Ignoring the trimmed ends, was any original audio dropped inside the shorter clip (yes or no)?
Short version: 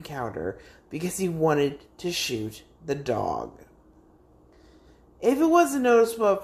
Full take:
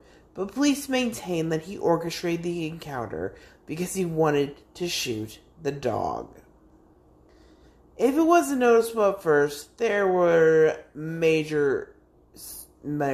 no